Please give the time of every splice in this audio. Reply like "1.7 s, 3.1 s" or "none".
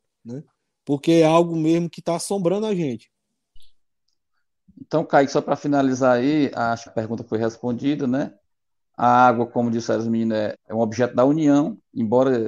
6.9 s, 10.5 s